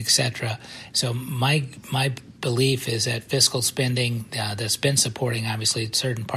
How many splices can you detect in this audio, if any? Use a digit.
1